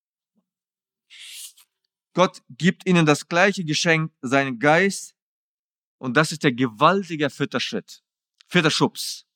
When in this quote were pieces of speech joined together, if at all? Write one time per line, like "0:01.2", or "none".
none

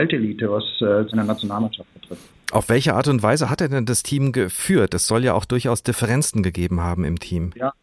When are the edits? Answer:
0:01.1

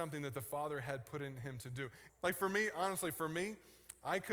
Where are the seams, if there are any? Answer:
0:02.1

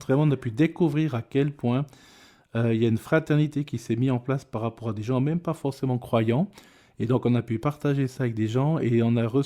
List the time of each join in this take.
none

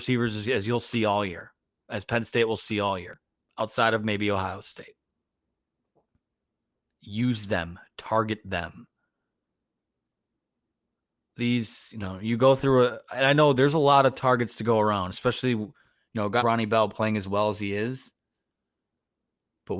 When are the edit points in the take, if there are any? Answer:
0:16.4

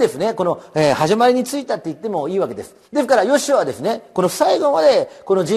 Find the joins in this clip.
0:02.8

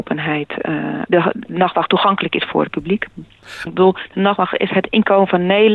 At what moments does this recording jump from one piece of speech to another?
0:01.1
0:03.7

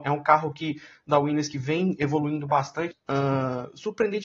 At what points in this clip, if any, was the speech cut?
0:02.9

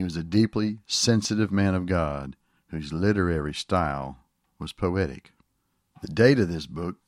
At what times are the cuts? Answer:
none

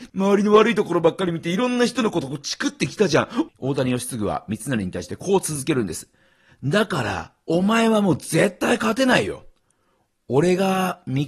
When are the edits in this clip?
0:03.5

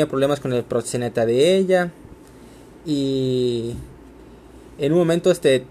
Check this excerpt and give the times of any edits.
none

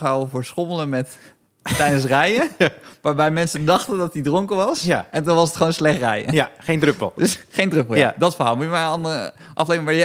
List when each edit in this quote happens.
none

